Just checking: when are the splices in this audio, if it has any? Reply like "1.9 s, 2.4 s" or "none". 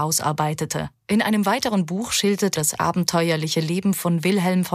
1.0 s, 2.6 s